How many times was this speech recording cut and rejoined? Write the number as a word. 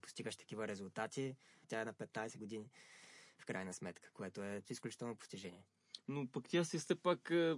two